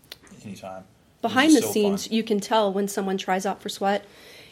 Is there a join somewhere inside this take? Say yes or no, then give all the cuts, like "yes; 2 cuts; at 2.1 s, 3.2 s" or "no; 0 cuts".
no; 0 cuts